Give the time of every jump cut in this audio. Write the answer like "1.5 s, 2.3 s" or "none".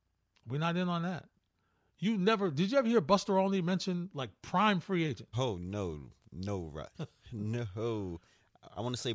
5.3 s, 6.9 s